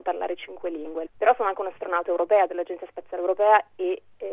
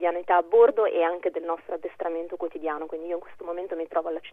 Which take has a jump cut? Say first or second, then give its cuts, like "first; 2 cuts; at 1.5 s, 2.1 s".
first; 1 cut; at 1.0 s